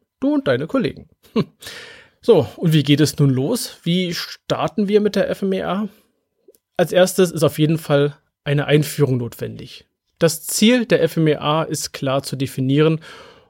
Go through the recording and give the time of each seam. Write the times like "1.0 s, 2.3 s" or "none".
2.1 s